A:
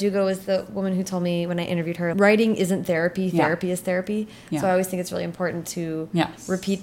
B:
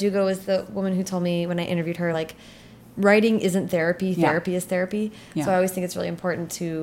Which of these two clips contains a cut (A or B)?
A